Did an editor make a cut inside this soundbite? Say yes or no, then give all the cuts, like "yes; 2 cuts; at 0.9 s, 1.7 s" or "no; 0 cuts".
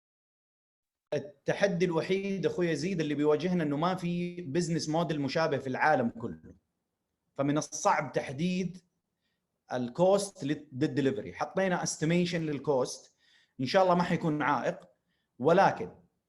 no; 0 cuts